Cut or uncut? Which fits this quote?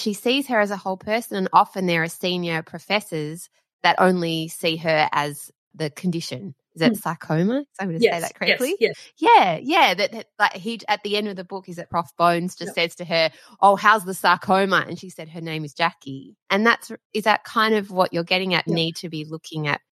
cut